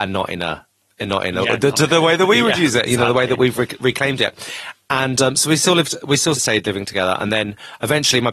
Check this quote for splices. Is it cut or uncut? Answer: uncut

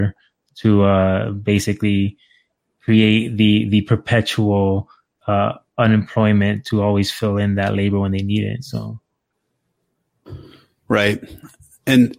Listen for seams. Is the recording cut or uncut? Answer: uncut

